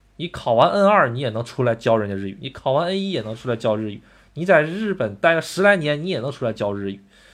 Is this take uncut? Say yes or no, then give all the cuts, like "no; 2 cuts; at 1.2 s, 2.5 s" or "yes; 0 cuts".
yes; 0 cuts